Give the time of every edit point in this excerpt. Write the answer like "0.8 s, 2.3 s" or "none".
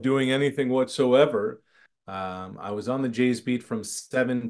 1.9 s